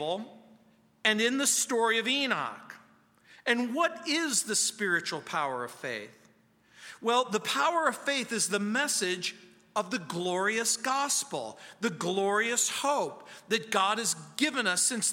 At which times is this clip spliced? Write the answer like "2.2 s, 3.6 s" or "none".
none